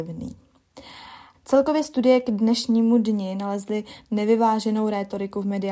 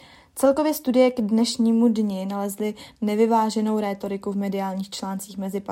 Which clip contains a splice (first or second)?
first